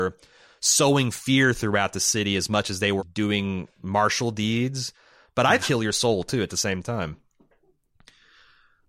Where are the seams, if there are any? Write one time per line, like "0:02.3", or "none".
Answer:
0:03.0
0:05.6